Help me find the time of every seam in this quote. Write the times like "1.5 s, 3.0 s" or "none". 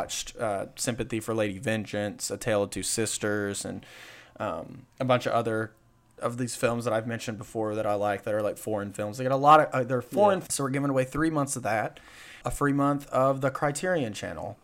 4.9 s, 10.5 s, 12.4 s